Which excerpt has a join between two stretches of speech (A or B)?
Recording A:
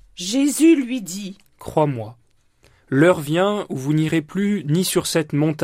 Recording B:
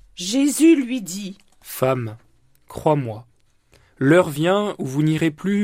A